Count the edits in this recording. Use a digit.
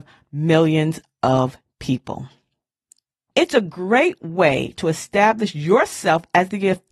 1